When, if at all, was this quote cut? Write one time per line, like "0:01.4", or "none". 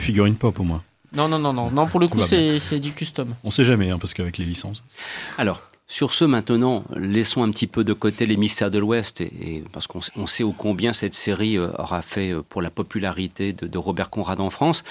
none